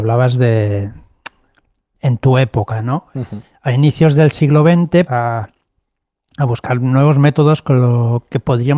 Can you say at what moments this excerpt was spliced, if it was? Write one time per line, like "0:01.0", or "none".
0:05.1